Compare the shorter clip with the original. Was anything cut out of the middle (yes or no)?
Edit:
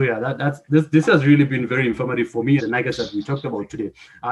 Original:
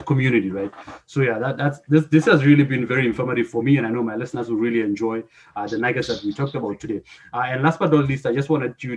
yes